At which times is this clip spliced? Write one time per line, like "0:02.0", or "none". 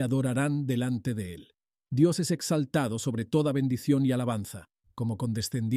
0:04.8

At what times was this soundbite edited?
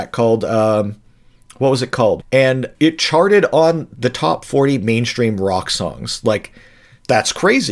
0:02.2

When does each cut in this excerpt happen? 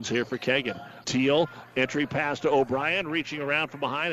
0:01.0

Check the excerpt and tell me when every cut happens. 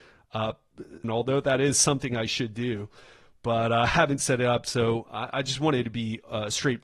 0:01.0

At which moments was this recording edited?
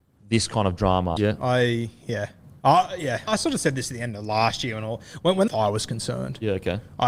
0:01.2
0:03.3
0:05.5

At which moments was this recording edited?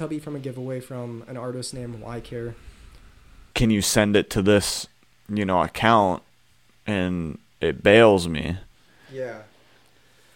0:03.5

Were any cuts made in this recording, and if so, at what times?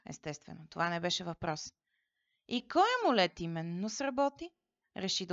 none

